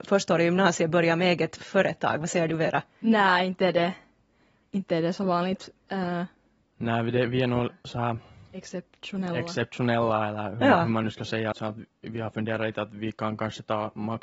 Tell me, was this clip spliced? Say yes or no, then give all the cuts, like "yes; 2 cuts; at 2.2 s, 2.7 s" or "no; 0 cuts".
yes; 1 cut; at 11.5 s